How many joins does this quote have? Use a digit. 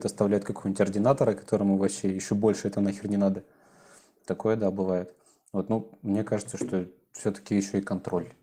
0